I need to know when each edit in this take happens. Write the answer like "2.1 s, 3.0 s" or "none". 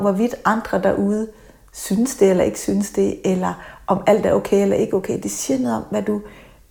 none